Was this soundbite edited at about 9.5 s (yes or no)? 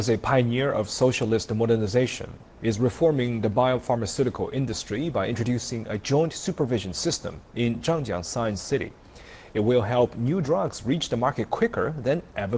no